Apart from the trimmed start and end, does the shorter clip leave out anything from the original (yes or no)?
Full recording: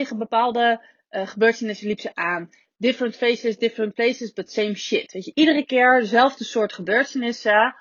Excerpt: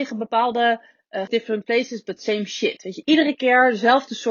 yes